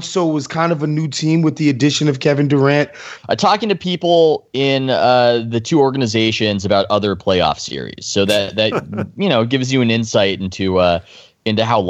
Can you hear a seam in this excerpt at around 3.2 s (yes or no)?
yes